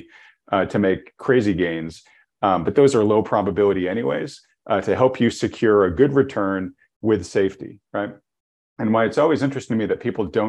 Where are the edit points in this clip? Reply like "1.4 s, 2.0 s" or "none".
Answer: none